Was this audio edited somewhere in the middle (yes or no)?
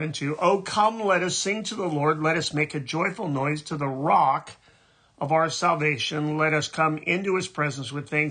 no